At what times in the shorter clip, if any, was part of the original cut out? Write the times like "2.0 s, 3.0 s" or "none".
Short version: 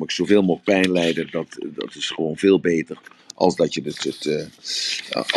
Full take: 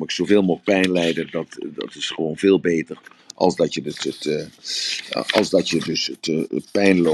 none